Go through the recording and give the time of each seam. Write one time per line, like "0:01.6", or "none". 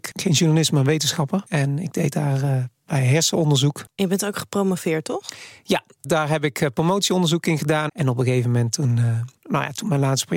0:06.0
0:07.9